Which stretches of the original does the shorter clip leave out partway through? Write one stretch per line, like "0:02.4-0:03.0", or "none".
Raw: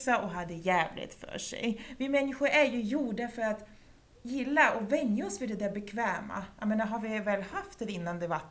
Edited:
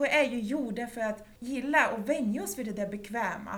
0:03.8-0:04.2

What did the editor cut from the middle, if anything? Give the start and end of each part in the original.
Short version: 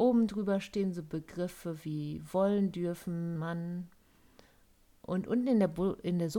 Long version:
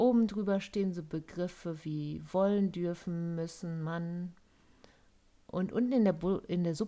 0:03.4-0:03.8

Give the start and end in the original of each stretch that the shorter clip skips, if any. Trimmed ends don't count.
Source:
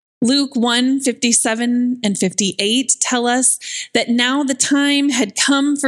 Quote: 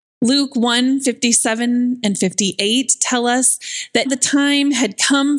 0:04.1-0:04.4

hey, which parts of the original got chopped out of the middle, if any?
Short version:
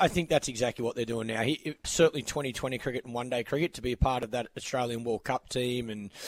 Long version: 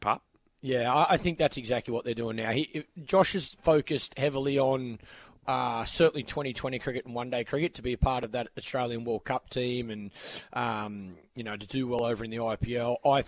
0:02.9-0:05.9

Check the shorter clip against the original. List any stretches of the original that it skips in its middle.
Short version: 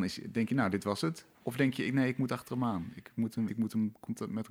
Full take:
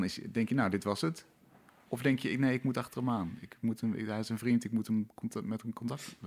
0:01.3-0:01.8
0:03.9-0:04.6

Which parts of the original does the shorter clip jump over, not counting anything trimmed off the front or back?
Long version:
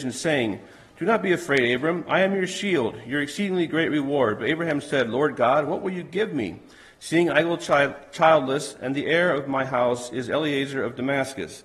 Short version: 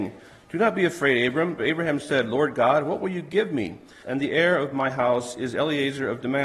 0:02.0-0:04.4
0:06.8-0:08.8

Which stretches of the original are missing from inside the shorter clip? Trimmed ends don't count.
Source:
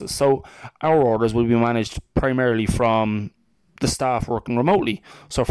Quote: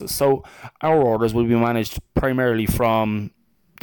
none

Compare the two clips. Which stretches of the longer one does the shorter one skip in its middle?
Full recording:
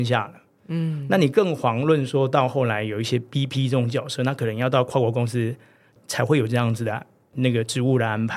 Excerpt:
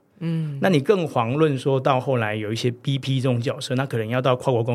none

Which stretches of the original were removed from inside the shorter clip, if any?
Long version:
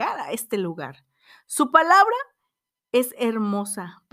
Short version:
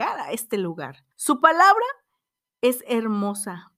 0:01.1-0:01.4

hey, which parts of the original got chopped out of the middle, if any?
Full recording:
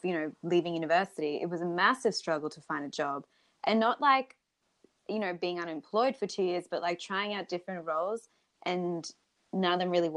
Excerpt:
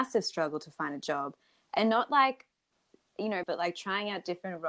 0:05.3-0:06.7

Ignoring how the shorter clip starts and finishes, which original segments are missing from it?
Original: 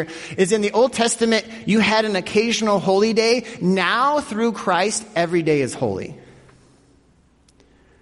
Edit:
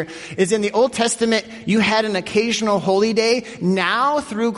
none

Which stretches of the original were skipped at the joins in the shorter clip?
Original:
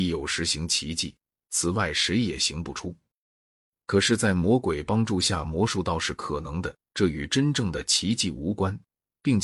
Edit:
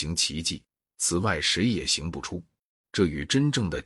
0:03.4-0:06.9

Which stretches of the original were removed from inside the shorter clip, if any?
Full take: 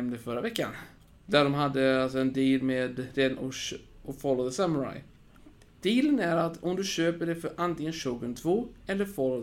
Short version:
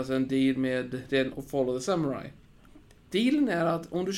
0:03.4-0:04.0

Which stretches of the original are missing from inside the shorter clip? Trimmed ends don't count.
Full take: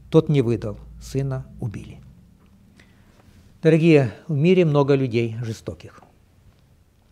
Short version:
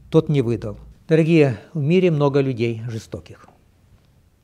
0:00.9-0:03.4

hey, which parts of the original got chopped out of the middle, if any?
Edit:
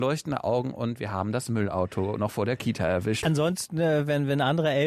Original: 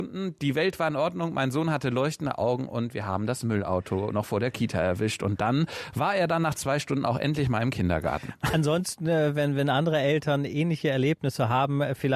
0:05.2-0:08.5

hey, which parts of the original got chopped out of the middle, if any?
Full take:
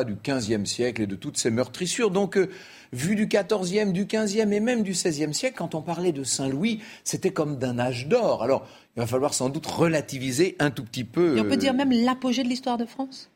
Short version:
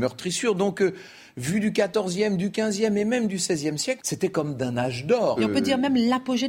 0:05.5-0:07.0
0:08.4-0:11.3

